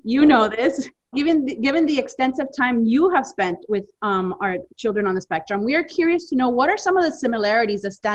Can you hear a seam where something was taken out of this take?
yes; 1 cut; at 1.1 s

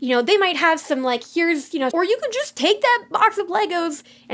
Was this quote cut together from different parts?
yes; 1 cut; at 1.9 s

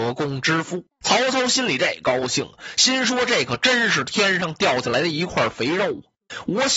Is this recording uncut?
no; 1 cut; at 1.0 s

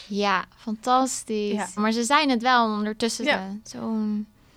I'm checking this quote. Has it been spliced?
yes; 2 cuts; at 1.8 s, 3.2 s

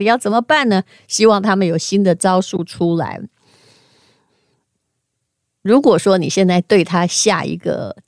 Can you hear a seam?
no; 0 cuts

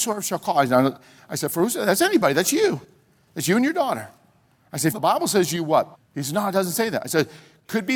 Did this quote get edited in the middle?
yes; 2 cuts; at 4.9 s, 5.9 s

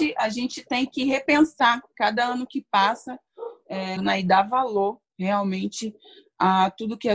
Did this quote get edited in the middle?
yes; 1 cut; at 4.0 s

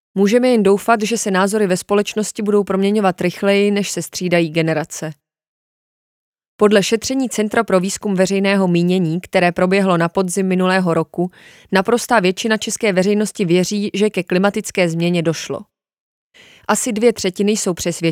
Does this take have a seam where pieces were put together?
no; 0 cuts

